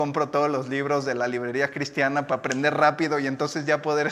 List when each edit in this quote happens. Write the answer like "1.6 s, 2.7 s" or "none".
none